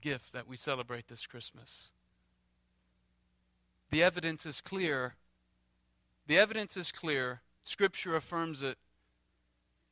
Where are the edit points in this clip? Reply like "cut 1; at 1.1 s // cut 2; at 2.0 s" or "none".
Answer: cut 1; at 7.6 s